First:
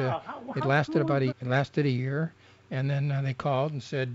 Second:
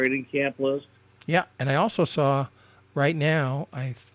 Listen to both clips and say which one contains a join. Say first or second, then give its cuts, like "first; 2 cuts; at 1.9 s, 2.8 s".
first; 1 cut; at 1.3 s